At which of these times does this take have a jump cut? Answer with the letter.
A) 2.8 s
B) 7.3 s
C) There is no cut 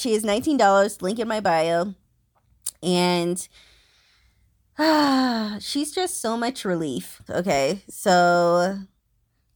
B